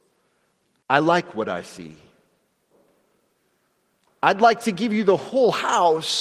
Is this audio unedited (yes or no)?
yes